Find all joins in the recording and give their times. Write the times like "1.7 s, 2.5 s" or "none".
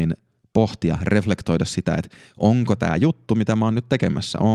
none